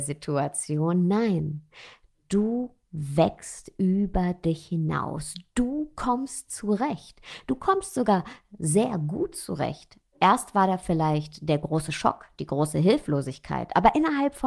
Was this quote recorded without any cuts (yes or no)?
yes